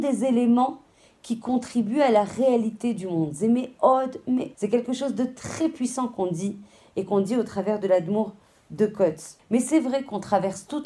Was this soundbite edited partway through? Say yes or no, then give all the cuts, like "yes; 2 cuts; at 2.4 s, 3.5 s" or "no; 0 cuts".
yes; 2 cuts; at 4.5 s, 9.4 s